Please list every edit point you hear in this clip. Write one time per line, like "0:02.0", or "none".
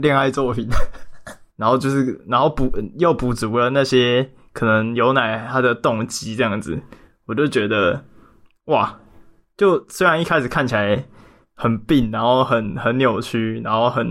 0:01.5